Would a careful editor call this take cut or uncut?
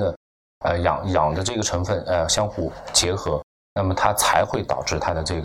uncut